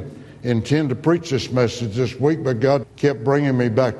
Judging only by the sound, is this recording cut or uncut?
cut